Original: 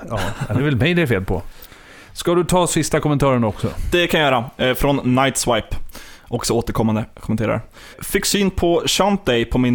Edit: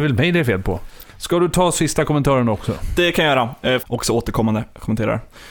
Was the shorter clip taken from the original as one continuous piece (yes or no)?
no